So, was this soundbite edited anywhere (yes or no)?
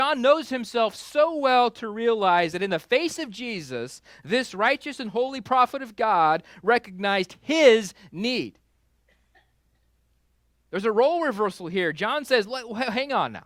no